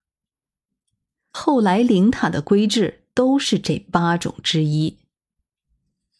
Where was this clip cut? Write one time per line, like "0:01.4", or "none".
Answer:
0:01.1